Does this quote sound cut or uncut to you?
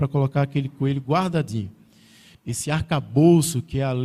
cut